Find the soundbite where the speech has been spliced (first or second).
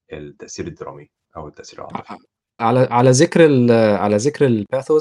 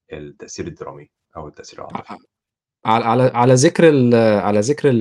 first